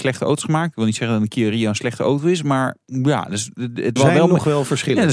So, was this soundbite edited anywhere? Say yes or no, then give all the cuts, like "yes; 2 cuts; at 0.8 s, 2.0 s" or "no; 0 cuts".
yes; 1 cut; at 4.0 s